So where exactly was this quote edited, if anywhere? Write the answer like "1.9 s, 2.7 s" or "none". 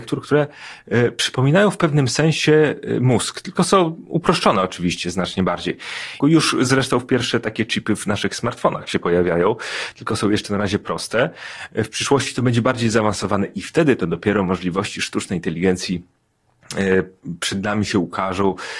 6.2 s